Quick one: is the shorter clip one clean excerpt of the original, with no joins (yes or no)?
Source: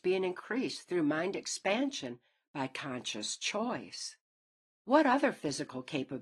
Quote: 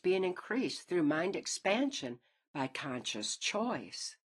yes